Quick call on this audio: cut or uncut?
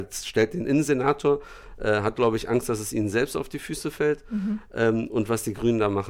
uncut